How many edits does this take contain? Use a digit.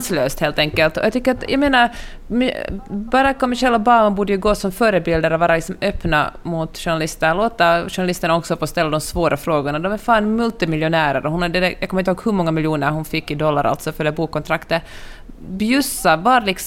0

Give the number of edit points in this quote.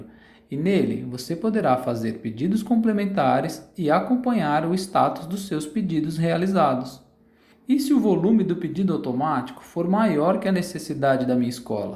1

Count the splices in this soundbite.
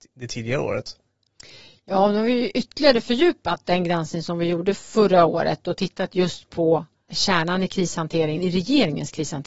1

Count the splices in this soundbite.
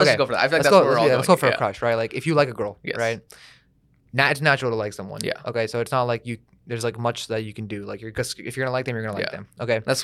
0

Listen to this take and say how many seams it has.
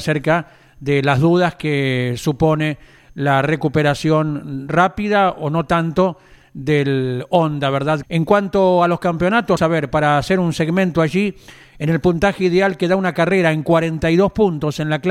2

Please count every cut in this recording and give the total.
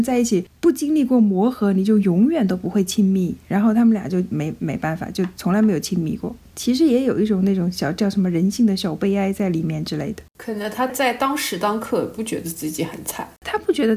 1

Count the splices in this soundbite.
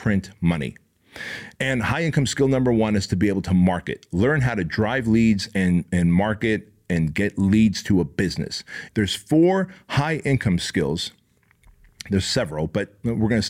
1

